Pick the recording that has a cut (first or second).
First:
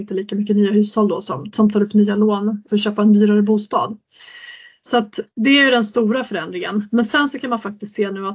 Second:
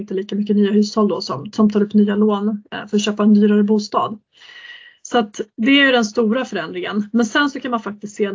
first